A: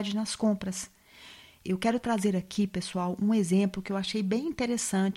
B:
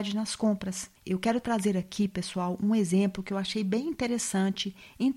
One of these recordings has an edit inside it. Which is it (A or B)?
B